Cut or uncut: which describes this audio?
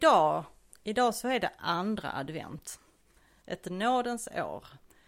cut